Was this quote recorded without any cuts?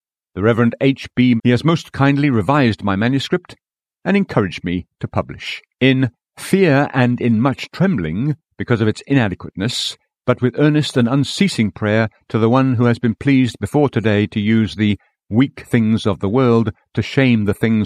no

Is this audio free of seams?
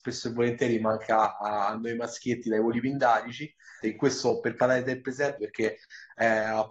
no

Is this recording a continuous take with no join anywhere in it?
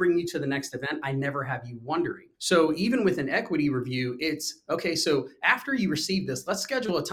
no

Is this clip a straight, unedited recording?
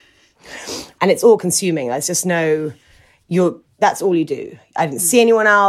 no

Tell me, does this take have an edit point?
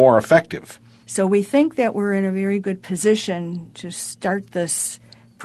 yes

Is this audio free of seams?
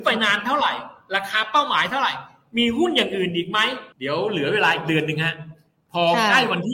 no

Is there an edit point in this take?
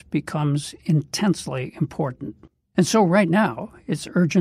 no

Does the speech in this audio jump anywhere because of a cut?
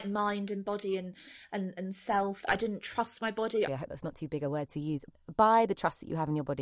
yes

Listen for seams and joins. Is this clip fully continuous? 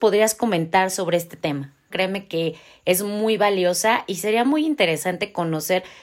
no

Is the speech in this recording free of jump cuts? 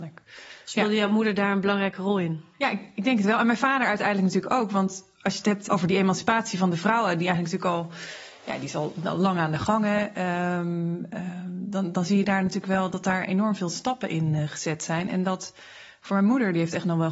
yes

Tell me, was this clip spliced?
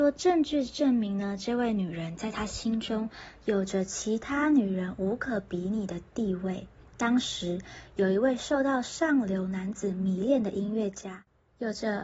no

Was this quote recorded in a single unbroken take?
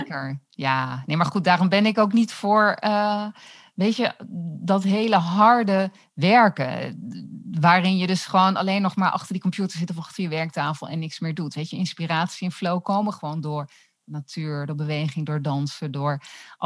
yes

